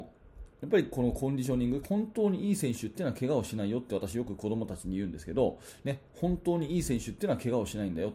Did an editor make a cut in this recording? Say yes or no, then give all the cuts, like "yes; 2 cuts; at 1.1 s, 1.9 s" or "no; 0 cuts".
yes; 1 cut; at 1.8 s